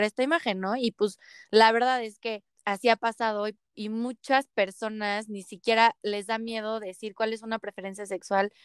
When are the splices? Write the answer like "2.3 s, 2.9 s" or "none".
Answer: 2.5 s

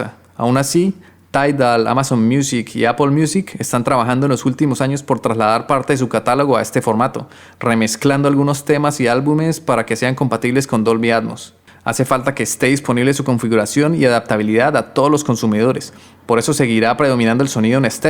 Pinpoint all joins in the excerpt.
11.7 s

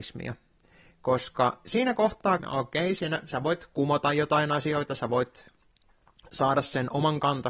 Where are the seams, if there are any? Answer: 2.4 s

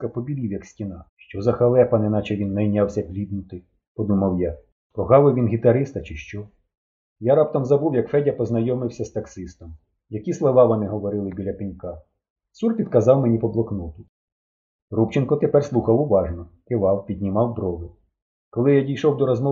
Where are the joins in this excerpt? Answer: 1.1 s, 7.2 s

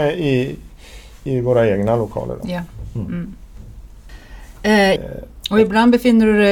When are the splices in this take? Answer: 1.3 s, 5.0 s

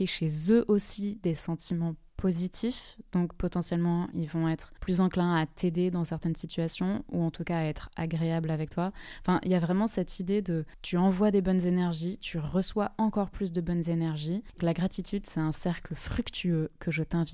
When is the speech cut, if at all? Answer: 14.6 s

